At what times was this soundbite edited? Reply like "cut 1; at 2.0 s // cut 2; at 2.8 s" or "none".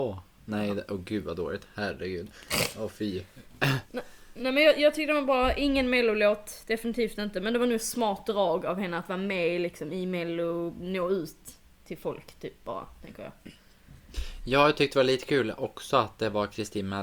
none

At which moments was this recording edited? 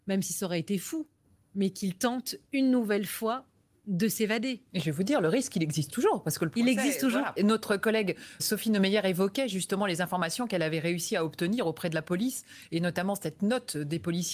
cut 1; at 7.4 s // cut 2; at 8.4 s

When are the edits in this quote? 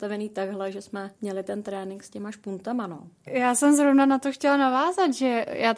cut 1; at 1.2 s // cut 2; at 3.3 s

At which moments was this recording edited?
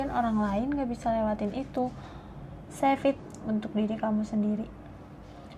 cut 1; at 2.7 s

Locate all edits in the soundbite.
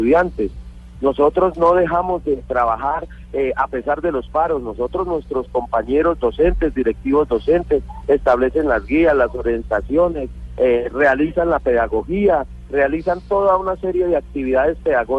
none

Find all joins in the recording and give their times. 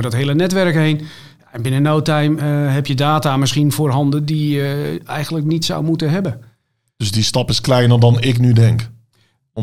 none

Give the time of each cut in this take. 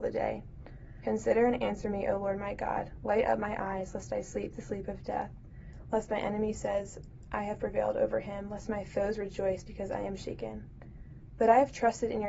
cut 1; at 1.0 s

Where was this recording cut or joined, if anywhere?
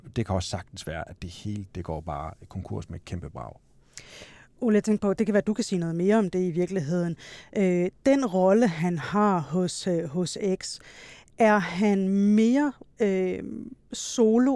none

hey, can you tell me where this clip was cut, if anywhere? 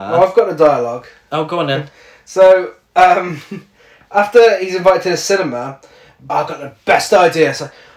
cut 1; at 6.3 s

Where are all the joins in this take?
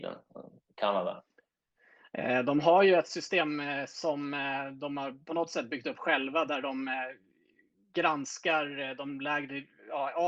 none

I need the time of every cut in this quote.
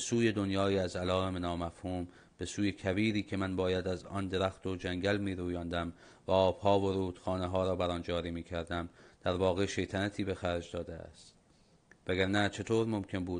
none

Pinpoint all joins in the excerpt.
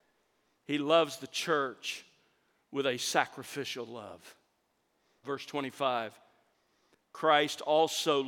cut 1; at 5.2 s

